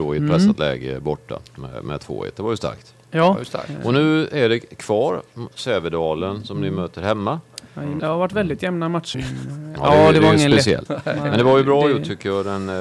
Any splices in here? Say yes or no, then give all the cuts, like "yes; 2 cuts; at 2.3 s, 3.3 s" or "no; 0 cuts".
yes; 3 cuts; at 8.0 s, 9.1 s, 10.9 s